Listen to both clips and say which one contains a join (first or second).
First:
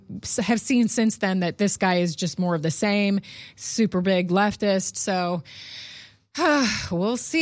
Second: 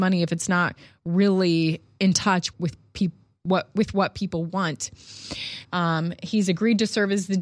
second